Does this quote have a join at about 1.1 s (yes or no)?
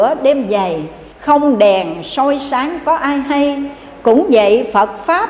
yes